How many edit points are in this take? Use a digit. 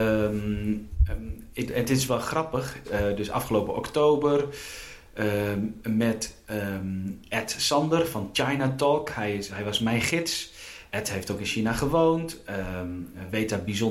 1